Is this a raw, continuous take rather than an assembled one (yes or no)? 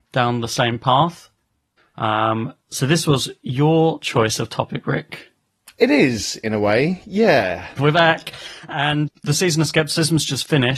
no